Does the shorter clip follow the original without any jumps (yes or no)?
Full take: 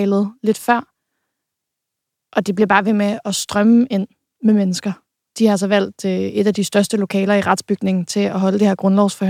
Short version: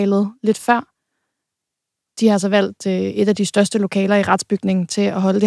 no